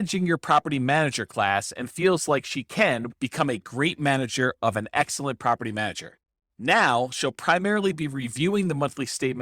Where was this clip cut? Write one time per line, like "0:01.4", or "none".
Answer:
0:03.1
0:06.3